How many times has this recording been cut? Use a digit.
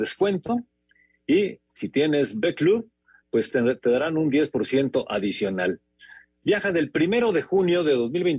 0